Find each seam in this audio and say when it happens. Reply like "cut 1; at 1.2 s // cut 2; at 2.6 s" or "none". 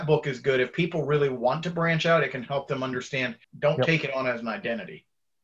cut 1; at 3.4 s